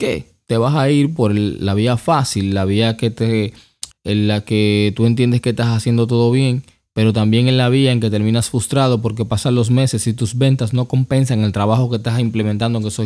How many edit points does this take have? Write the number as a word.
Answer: one